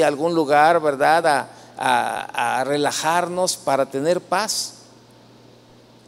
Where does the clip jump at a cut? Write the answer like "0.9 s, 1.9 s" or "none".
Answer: none